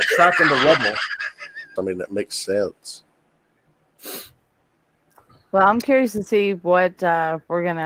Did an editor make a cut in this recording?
yes; 1 cut; at 1.8 s

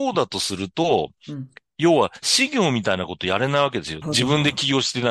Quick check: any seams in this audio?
yes; 1 cut; at 4.0 s

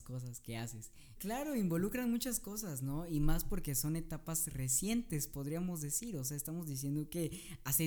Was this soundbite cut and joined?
yes; 1 cut; at 1.2 s

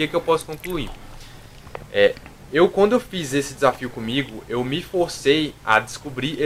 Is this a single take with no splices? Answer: yes; 0 cuts

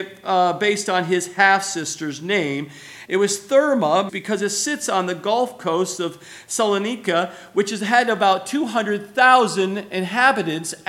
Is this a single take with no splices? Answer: no; 2 cuts; at 3.0 s, 4.1 s

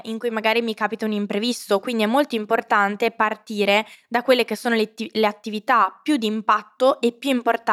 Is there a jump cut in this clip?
no; 0 cuts

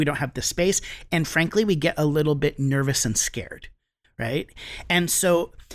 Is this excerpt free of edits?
yes; 0 cuts

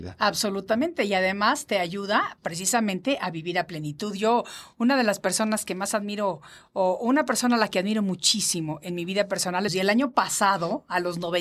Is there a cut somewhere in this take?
yes; 1 cut; at 9.7 s

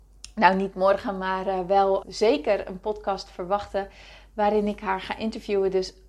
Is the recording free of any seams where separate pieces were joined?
no; 1 cut; at 2.0 s

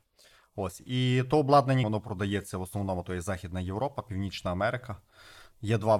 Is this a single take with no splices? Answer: no; 1 cut; at 1.8 s

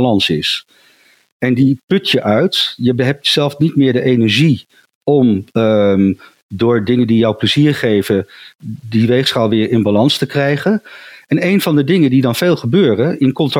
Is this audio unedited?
yes; 0 cuts

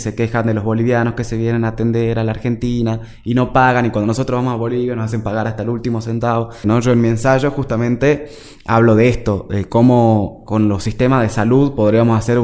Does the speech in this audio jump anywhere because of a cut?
yes; 1 cut; at 6.6 s

